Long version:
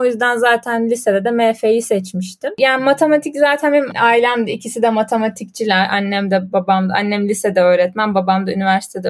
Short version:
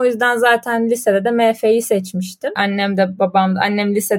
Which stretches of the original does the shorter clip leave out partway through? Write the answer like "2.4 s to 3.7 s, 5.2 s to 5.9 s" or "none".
2.6 s to 5.9 s